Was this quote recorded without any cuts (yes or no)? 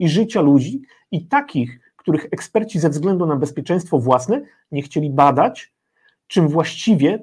yes